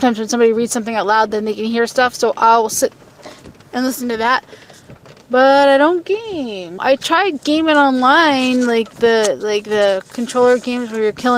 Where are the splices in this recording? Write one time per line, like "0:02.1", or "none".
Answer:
0:06.8